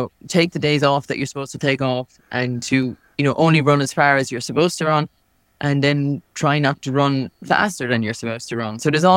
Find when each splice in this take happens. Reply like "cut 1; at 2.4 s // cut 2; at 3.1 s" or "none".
none